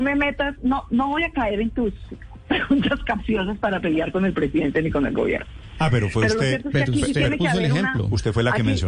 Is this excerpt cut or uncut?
uncut